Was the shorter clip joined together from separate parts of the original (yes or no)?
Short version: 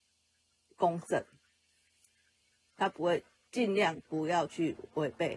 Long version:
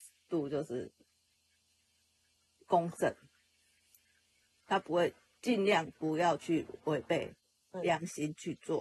no